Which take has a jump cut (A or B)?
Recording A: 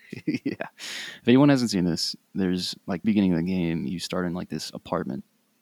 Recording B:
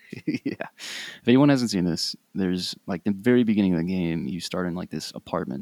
A